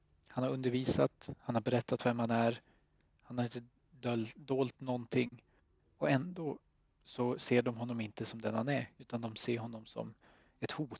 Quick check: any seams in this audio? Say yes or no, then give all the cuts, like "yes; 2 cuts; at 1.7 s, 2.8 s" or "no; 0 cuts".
yes; 1 cut; at 9.0 s